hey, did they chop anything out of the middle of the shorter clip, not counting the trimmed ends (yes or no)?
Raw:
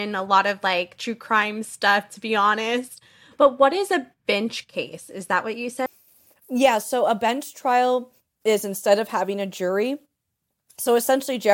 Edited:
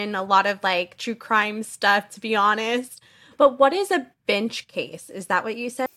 no